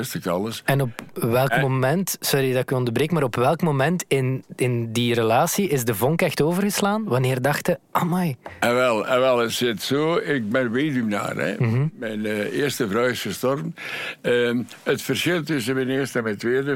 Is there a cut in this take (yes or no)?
no